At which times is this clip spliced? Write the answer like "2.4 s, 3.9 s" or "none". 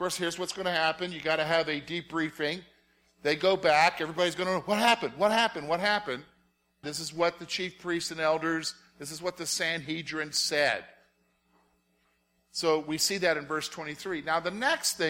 6.8 s